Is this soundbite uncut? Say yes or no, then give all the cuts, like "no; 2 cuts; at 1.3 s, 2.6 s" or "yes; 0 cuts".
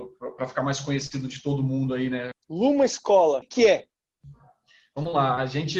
no; 2 cuts; at 2.3 s, 3.4 s